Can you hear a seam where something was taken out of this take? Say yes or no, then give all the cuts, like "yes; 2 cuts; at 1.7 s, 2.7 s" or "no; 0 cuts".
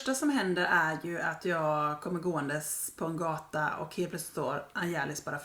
no; 0 cuts